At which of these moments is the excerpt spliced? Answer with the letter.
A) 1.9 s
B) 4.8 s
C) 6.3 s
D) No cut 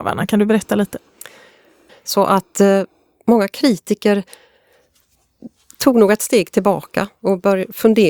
A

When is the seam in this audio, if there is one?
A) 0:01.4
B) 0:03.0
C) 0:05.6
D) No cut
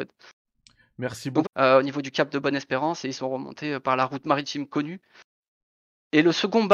A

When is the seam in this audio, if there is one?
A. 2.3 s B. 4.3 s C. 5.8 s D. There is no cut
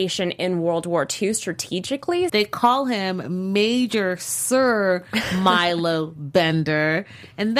A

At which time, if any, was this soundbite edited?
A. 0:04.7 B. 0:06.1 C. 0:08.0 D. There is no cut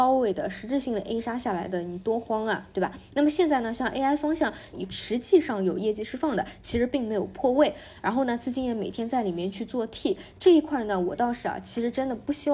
A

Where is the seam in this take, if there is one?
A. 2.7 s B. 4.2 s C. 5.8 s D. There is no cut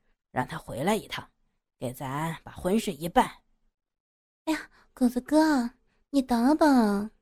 B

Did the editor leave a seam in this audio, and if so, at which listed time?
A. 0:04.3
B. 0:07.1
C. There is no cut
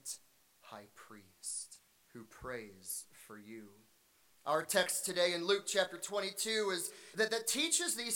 B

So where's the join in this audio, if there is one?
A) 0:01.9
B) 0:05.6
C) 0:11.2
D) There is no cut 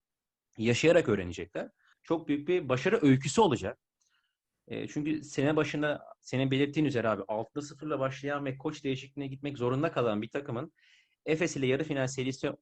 A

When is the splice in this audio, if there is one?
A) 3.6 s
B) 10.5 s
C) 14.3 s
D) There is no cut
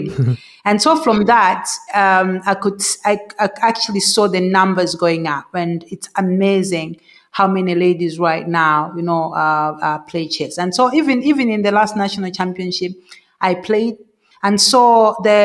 C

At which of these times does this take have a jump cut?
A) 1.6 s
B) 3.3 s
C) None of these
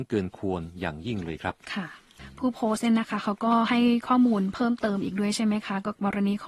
A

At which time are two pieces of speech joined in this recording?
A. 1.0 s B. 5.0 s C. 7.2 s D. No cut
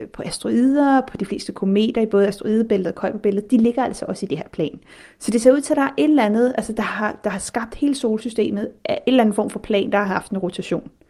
D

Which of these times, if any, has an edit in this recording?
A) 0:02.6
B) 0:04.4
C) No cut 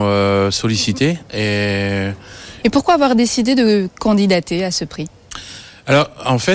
A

